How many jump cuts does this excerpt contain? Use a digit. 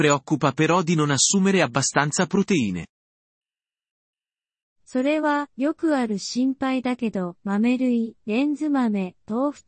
0